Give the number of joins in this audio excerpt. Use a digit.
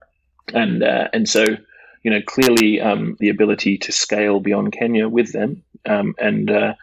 1